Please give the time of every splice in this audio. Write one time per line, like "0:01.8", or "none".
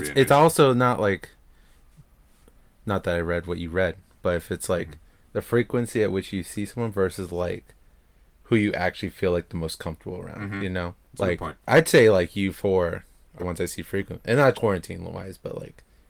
0:11.0
0:13.4
0:14.5

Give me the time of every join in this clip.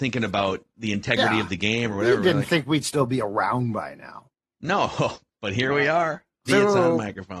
0:06.5

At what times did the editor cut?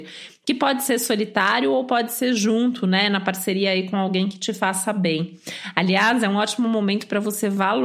none

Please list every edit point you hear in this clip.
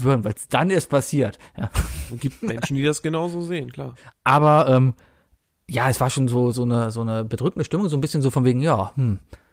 0:04.1

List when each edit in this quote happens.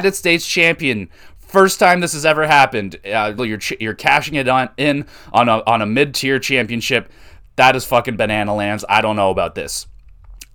0:03.4

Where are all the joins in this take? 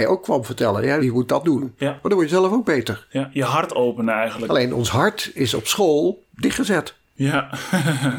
0:01.0
0:04.4

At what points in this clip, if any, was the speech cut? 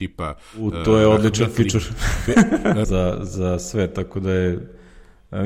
0:02.8

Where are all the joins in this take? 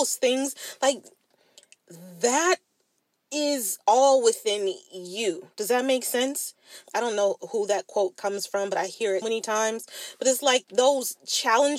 0:06.8
0:09.2
0:10.6

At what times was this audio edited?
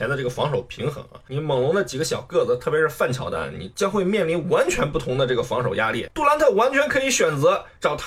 none

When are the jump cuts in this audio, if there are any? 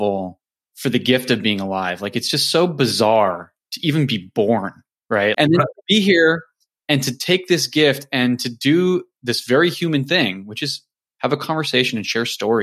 0:05.3

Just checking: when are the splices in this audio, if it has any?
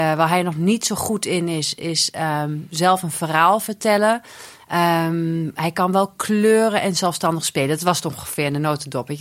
none

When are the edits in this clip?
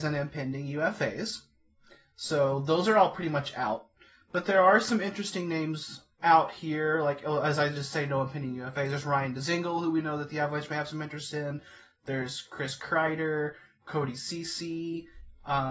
none

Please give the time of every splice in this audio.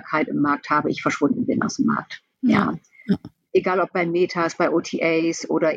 0:02.3

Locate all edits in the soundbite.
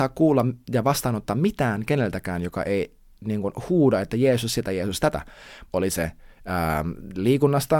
0:05.7

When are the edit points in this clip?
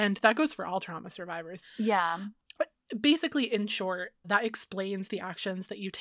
0:01.6
0:04.2

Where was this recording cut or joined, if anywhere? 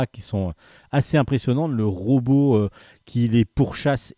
none

